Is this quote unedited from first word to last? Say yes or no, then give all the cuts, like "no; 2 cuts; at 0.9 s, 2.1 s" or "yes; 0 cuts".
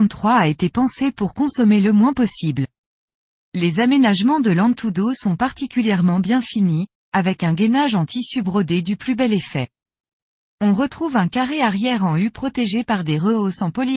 no; 1 cut; at 3.4 s